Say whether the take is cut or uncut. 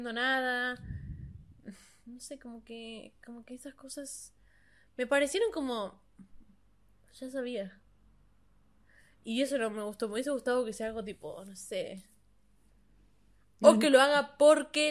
uncut